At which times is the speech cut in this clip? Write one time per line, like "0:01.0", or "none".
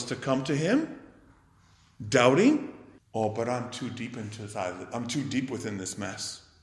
0:03.0